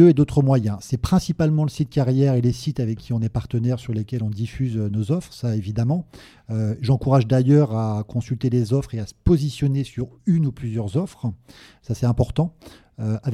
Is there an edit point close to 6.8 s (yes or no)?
no